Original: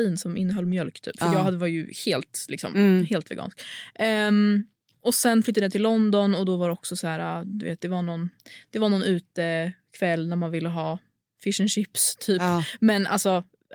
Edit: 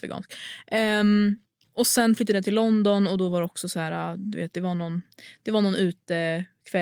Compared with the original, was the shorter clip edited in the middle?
no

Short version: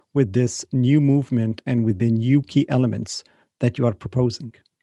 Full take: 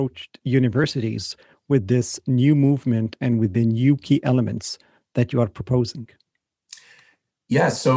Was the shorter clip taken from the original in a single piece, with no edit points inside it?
yes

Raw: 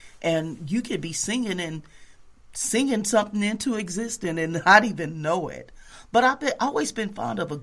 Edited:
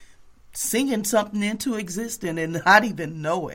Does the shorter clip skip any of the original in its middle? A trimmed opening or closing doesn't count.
no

